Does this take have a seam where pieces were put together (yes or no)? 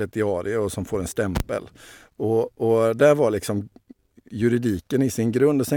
no